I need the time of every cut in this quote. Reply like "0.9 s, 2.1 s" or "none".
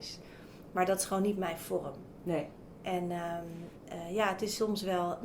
none